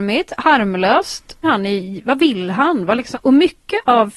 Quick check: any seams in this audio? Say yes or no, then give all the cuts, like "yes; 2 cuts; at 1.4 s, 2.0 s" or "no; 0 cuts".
yes; 2 cuts; at 1.4 s, 3.1 s